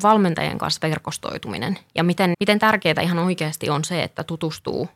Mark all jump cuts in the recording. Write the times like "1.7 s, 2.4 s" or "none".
2.3 s